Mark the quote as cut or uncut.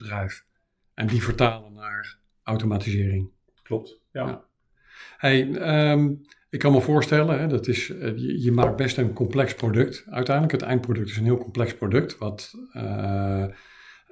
uncut